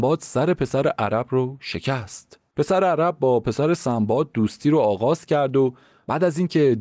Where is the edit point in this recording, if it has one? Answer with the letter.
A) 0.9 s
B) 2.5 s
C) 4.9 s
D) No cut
B